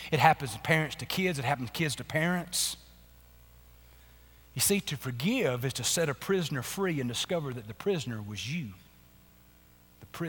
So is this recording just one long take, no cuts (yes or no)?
yes